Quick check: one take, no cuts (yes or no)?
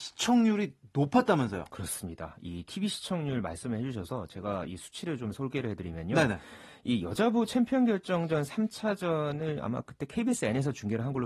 yes